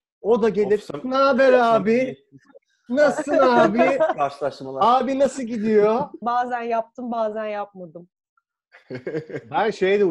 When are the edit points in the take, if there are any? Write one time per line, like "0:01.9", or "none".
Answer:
0:06.2